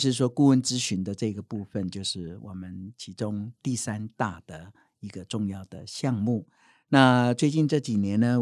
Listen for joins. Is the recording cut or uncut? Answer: uncut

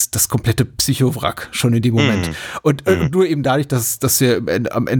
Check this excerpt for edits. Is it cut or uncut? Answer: uncut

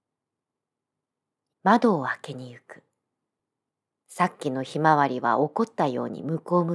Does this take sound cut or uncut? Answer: cut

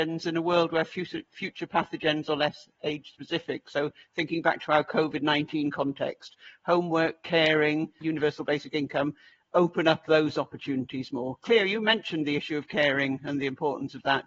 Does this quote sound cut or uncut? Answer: cut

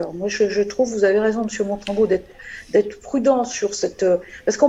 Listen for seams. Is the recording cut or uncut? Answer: uncut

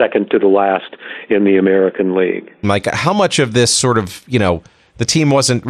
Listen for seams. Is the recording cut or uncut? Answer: cut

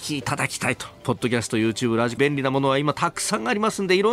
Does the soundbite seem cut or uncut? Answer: cut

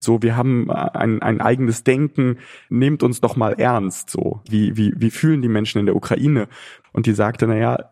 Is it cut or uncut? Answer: cut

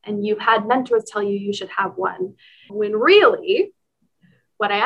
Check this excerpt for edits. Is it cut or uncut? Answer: cut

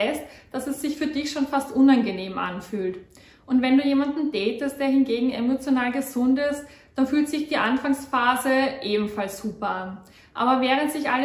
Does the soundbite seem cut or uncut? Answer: uncut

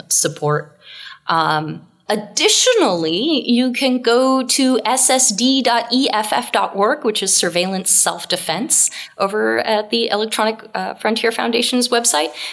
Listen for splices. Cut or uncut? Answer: uncut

